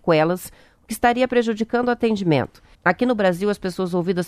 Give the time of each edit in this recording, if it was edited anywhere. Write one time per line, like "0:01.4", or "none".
0:02.7